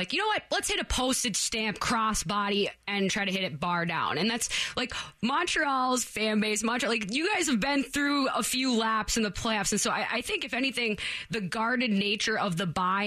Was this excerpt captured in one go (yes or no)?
yes